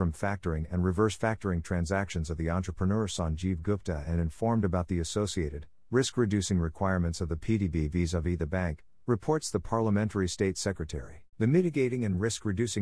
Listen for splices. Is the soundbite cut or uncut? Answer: cut